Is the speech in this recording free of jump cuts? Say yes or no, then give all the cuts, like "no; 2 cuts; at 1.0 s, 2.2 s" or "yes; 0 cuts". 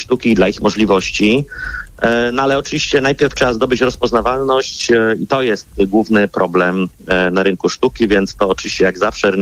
yes; 0 cuts